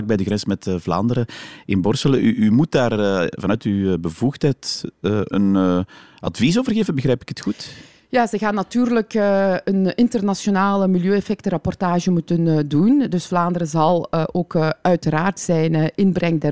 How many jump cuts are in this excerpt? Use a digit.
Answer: 1